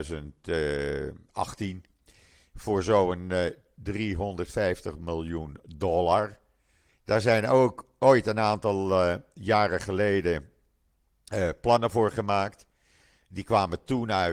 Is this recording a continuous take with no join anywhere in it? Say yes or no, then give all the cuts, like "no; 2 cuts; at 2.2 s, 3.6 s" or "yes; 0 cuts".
no; 1 cut; at 6.9 s